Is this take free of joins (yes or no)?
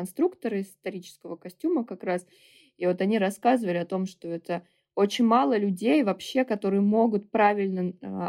yes